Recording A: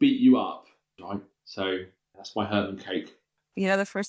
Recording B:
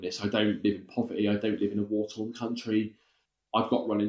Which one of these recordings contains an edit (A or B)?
A